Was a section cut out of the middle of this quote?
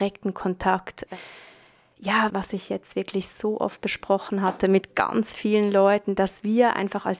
yes; 1 cut; at 2.3 s

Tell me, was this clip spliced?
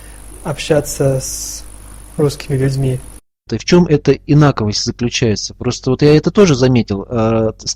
yes; 1 cut; at 3.5 s

